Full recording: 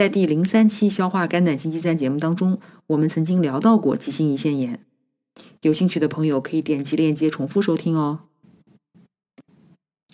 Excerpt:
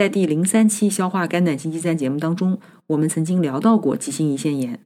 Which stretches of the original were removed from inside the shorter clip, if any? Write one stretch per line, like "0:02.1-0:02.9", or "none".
none